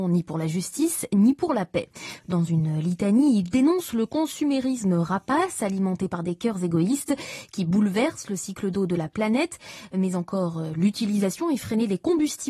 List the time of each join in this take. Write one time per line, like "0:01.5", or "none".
0:02.2